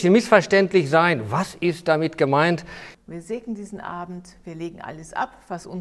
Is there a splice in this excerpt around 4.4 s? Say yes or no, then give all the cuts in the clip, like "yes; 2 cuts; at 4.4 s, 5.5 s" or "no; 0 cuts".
no; 1 cut; at 2.9 s